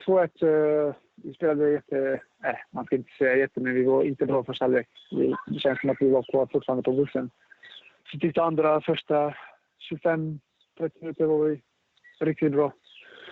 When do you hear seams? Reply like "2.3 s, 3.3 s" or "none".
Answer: 8.0 s